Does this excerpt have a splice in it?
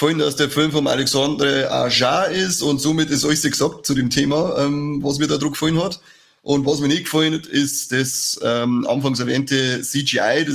no; 0 cuts

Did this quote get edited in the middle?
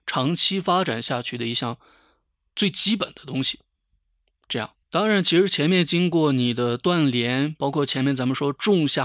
yes; 1 cut; at 4.8 s

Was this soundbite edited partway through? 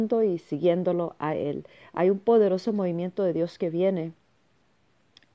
no; 0 cuts

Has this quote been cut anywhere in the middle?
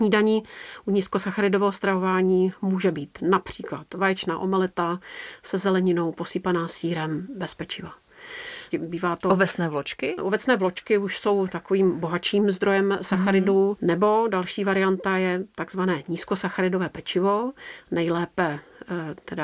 yes; 3 cuts; at 8.7 s, 10.2 s, 13.8 s

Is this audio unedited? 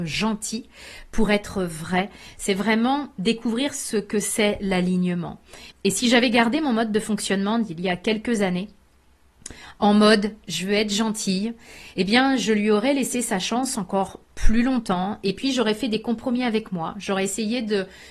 no; 1 cut; at 5.7 s

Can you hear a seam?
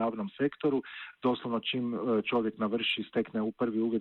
no; 0 cuts

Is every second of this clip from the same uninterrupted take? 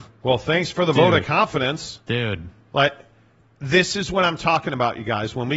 yes; 0 cuts

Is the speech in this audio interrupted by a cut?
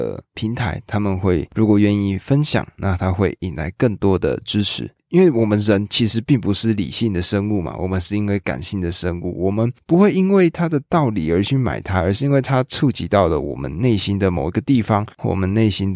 yes; 1 cut; at 5.0 s

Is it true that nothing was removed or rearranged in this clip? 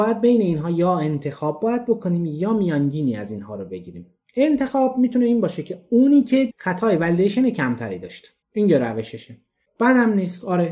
no; 1 cut; at 8.4 s

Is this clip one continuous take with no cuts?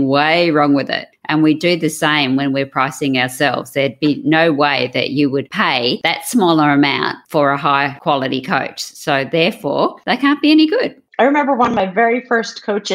yes; 0 cuts

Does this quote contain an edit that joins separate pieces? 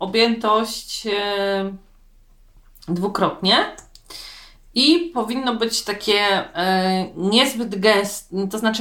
no; 0 cuts

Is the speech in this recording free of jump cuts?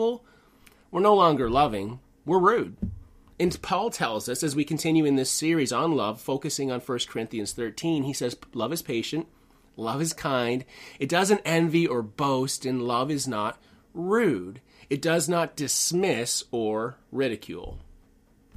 yes; 0 cuts

